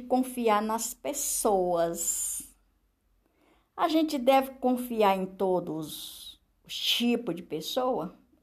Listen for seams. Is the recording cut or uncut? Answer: uncut